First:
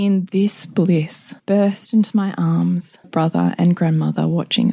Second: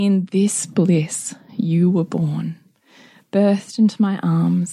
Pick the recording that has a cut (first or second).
first